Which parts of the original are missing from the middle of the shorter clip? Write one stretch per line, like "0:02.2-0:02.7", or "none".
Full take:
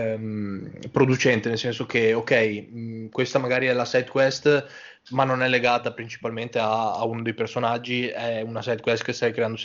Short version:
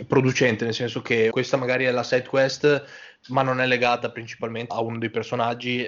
0:02.1-0:03.1
0:06.5-0:06.9